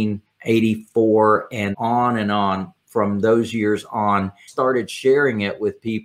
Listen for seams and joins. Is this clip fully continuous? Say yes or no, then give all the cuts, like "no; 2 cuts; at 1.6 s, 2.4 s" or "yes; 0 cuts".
no; 2 cuts; at 1.7 s, 4.5 s